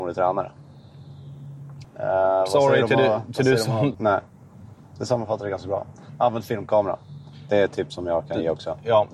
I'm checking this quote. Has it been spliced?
yes; 2 cuts; at 1.8 s, 3.9 s

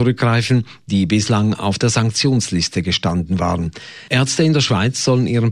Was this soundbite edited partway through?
yes; 1 cut; at 4.1 s

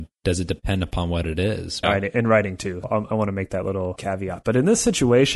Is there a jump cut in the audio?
yes; 2 cuts; at 1.8 s, 2.8 s

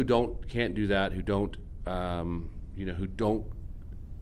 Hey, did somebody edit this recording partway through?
no; 0 cuts

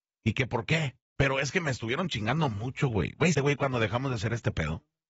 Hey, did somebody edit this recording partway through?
yes; 2 cuts; at 1.2 s, 3.3 s

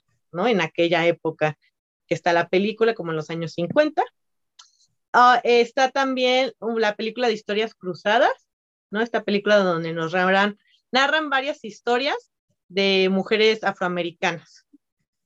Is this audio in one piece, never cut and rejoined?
yes; 0 cuts

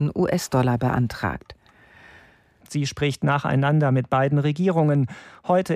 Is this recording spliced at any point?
yes; 1 cut; at 2.6 s

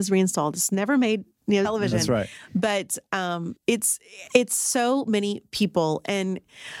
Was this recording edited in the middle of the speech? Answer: yes; 2 cuts; at 1.6 s, 3.6 s

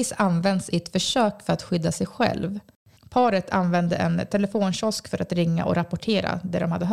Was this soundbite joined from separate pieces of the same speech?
yes; 1 cut; at 3.0 s

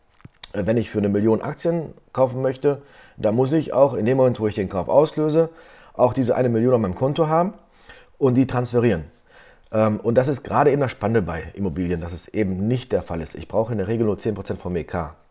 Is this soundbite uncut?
yes; 0 cuts

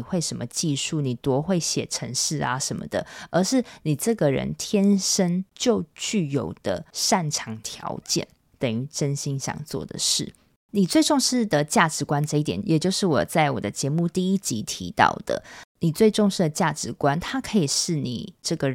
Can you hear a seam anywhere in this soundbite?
yes; 2 cuts; at 8.4 s, 12.6 s

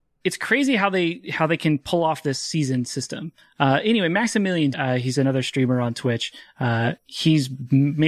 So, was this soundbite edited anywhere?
yes; 1 cut; at 4.7 s

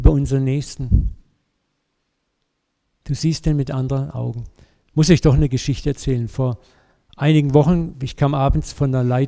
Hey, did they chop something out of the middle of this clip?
no; 0 cuts

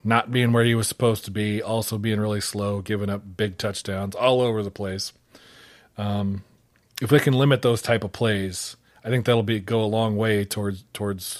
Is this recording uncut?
yes; 0 cuts

